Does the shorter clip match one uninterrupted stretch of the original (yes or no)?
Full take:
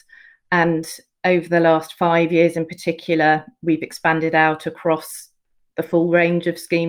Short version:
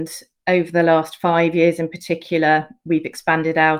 yes